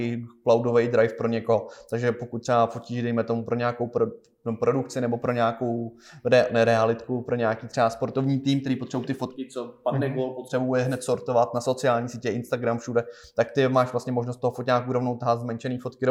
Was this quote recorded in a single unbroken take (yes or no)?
yes